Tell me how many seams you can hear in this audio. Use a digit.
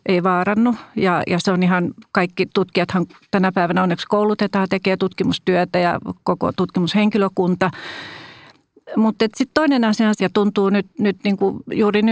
1